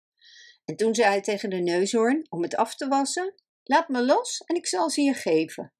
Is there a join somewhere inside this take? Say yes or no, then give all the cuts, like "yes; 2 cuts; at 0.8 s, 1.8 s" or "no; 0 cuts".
yes; 1 cut; at 3.5 s